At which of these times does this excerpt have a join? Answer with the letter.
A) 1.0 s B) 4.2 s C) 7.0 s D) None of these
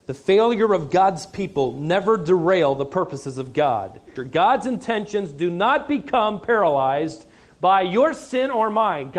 B